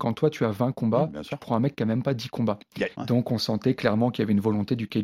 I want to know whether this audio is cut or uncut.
cut